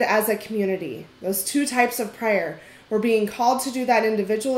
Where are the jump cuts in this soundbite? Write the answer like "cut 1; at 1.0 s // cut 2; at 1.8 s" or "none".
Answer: none